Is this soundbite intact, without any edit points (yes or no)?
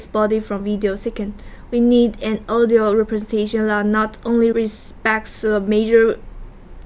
no